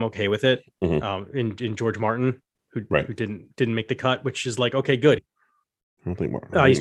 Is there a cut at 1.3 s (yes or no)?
no